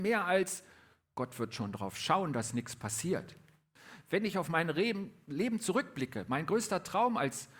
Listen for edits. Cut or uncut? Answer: uncut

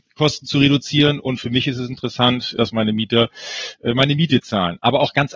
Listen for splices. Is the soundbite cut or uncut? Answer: cut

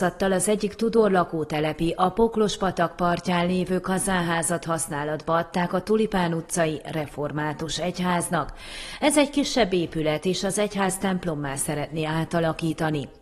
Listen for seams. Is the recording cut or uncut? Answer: uncut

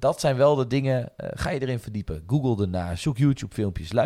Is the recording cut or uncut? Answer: uncut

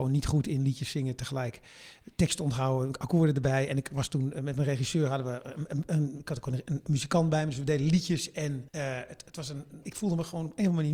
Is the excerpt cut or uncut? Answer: cut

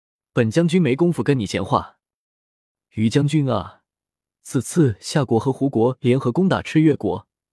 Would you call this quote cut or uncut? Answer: cut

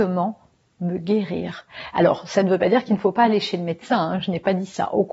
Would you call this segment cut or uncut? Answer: uncut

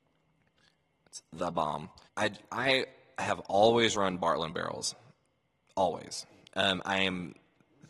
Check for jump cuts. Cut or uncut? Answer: cut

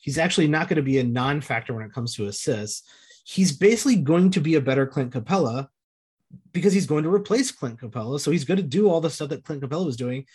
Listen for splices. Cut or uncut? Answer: uncut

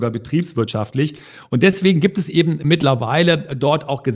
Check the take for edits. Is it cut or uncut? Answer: uncut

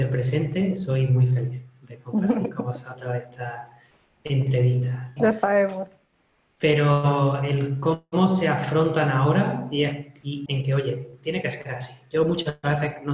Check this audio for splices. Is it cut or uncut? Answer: cut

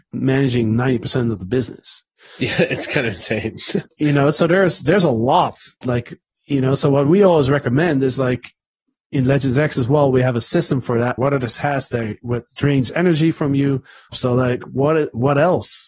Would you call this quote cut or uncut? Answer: cut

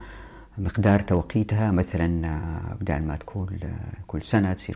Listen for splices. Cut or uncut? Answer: uncut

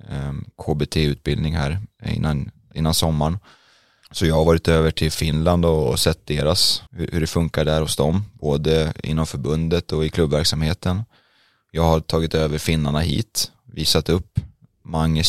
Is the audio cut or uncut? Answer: cut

